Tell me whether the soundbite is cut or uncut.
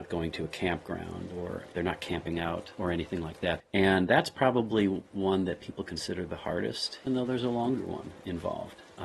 cut